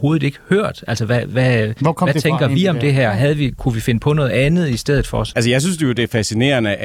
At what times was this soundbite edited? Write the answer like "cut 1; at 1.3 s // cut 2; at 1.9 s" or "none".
cut 1; at 5.3 s